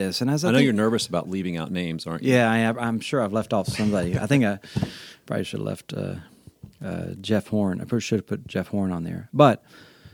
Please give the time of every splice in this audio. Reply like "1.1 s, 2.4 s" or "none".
none